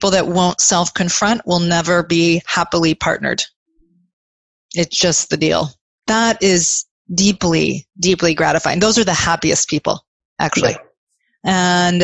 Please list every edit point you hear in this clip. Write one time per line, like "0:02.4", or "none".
0:06.0